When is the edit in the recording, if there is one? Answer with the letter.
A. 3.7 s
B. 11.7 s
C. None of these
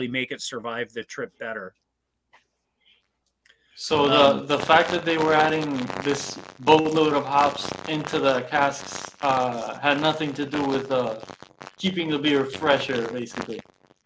C